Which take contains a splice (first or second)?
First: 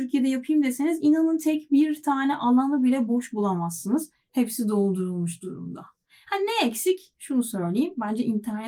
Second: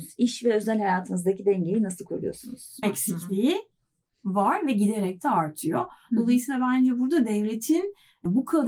second